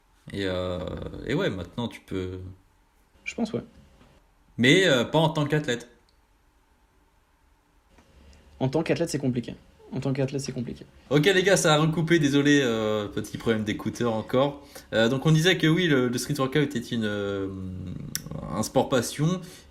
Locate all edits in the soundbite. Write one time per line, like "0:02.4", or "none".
0:03.1